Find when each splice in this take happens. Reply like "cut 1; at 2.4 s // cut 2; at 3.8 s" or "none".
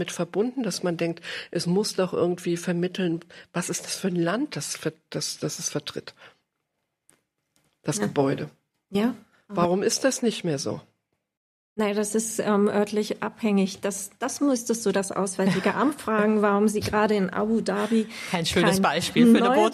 none